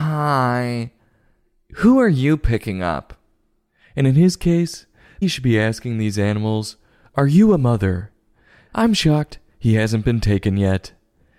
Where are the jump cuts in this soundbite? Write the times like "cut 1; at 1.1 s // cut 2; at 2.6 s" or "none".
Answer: cut 1; at 5.2 s // cut 2; at 8.7 s

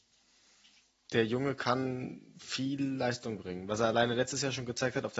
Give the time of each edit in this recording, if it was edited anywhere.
cut 1; at 0.9 s

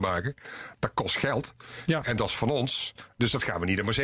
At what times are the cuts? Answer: none

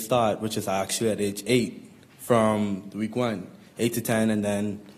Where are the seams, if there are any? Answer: none

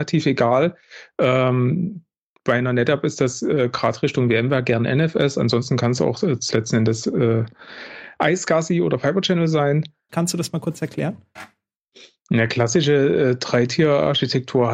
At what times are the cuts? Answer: cut 1; at 6.5 s // cut 2; at 10.1 s

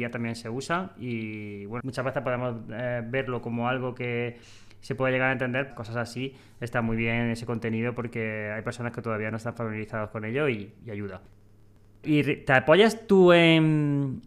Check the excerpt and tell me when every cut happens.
cut 1; at 1.8 s // cut 2; at 5.7 s

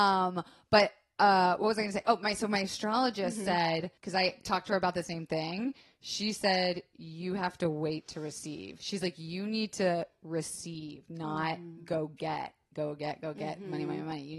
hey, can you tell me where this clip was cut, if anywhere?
cut 1; at 4.0 s

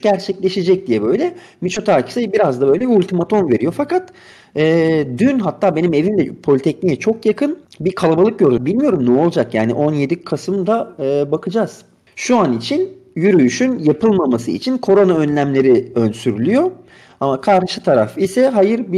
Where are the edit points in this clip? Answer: cut 1; at 8.6 s

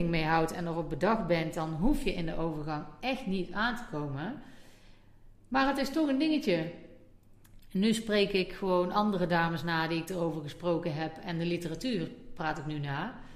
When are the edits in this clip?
cut 1; at 5.4 s // cut 2; at 7.6 s

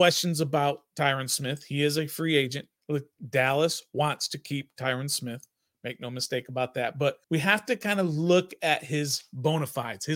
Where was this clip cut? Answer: cut 1; at 7.2 s

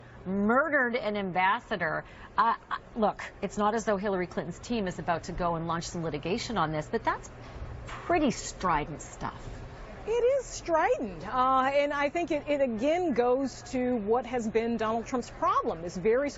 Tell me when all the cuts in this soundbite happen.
none

